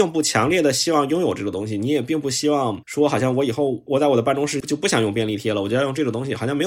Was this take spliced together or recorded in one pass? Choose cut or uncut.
uncut